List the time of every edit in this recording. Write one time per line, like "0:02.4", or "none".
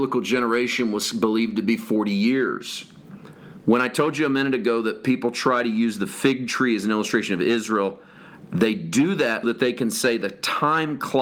0:03.6
0:09.4